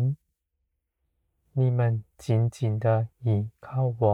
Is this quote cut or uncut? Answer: uncut